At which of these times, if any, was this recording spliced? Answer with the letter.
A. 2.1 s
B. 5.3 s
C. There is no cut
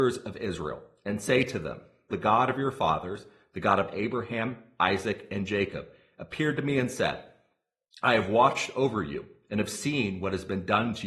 A